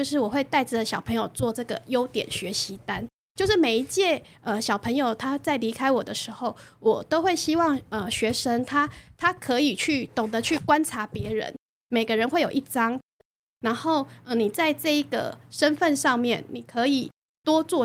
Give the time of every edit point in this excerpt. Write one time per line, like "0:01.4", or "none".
0:13.2